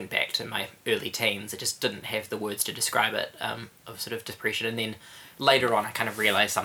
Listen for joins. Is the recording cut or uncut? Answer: uncut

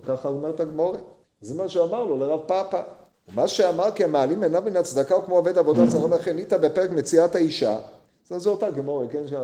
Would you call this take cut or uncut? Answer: uncut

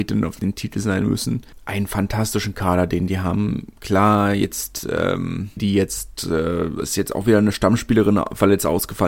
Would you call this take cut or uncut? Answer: cut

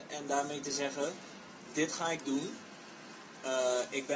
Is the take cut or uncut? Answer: cut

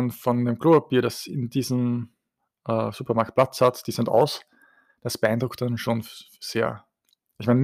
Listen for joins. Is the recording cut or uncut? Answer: uncut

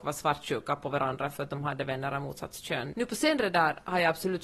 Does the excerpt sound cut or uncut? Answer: cut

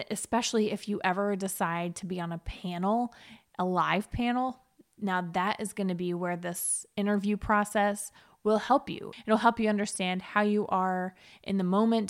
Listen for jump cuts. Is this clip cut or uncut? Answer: uncut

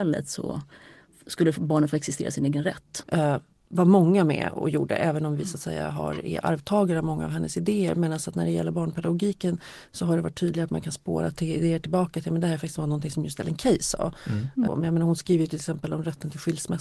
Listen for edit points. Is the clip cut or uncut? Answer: cut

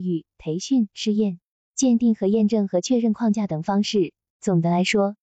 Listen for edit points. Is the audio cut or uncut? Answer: cut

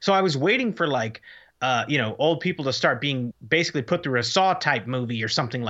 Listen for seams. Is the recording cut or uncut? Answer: cut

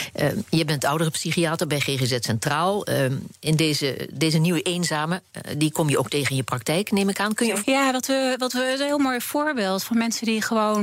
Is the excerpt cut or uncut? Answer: cut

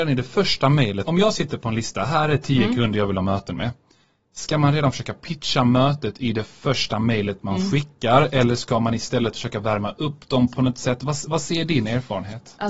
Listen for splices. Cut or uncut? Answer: cut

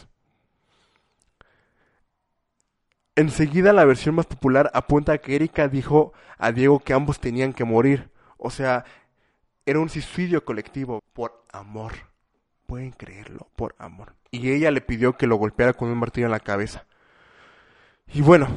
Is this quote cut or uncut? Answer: cut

